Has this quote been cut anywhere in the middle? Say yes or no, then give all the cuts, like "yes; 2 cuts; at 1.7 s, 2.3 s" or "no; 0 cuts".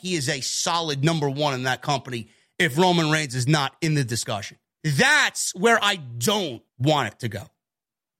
yes; 2 cuts; at 4.8 s, 6.7 s